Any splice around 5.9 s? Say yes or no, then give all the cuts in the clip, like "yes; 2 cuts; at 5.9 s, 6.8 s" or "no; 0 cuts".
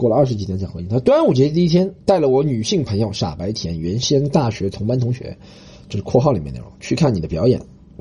no; 1 cut; at 2.0 s